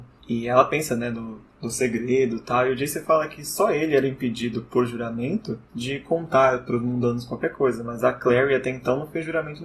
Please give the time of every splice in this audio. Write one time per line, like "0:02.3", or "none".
none

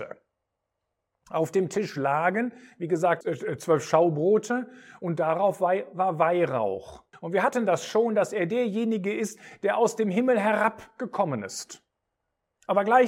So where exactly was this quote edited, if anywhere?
0:03.2
0:07.1

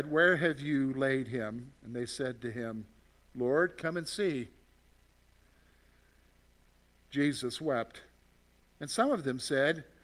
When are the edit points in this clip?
0:08.8

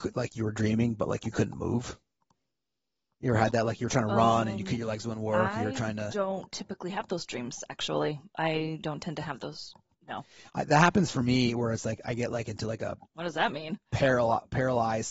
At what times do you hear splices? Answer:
none

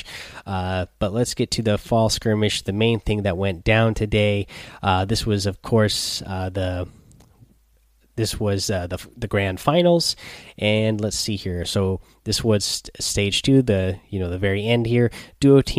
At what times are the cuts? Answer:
none

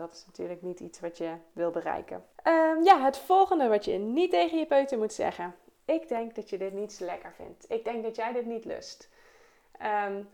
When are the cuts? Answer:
0:02.3

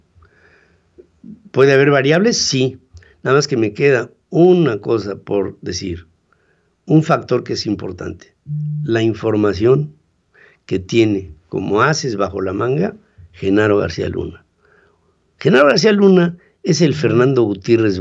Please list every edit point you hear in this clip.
none

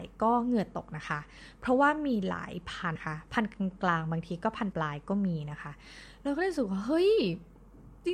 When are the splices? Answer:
0:03.0
0:04.7

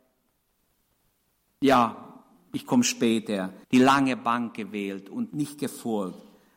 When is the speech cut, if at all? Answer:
0:03.6
0:05.3

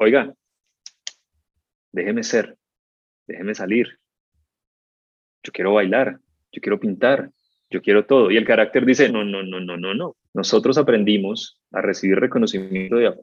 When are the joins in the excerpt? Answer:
0:09.1
0:10.2

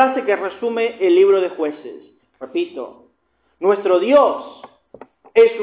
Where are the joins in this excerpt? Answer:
0:02.2

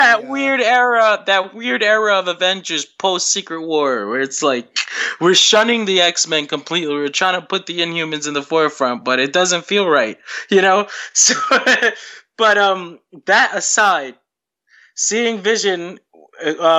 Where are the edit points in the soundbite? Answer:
none

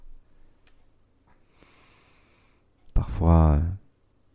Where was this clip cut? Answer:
0:02.9

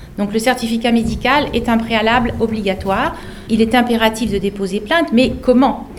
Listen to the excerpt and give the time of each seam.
0:03.5

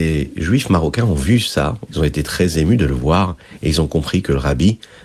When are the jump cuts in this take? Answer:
0:01.9

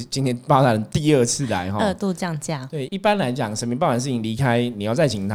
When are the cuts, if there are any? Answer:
0:02.9

